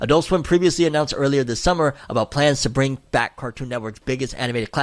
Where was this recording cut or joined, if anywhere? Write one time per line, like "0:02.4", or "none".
none

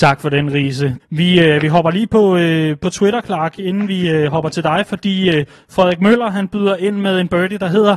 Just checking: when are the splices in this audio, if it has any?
0:01.0

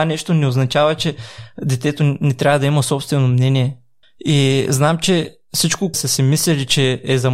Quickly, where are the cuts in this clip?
0:04.0
0:05.9

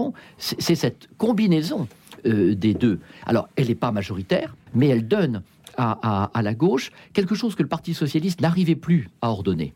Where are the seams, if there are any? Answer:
0:04.7

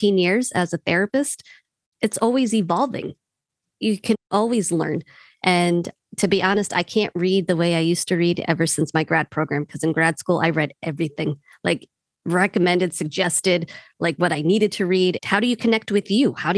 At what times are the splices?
0:15.2

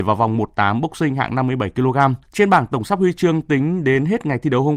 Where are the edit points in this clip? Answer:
0:02.2

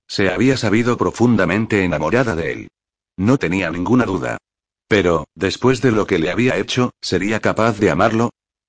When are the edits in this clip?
none

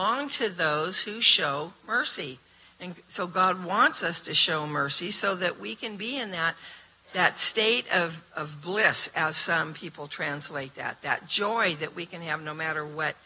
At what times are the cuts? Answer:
none

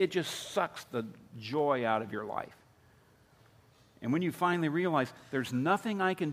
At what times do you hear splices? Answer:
none

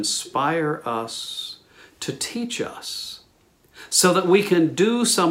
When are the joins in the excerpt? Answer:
none

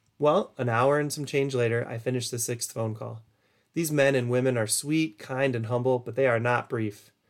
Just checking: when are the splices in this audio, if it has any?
none

